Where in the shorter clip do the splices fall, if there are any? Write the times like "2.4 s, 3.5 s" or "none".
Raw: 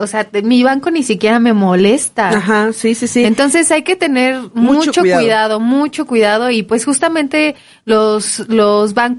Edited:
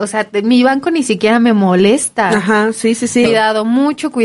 3.3 s